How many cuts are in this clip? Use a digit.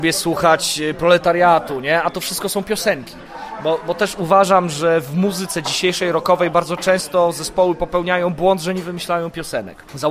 0